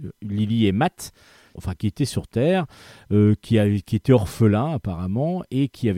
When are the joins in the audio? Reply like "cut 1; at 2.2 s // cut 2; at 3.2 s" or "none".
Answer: cut 1; at 1.6 s